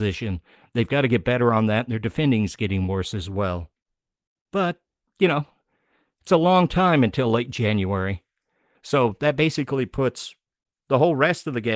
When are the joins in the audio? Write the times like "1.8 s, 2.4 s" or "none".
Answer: 8.8 s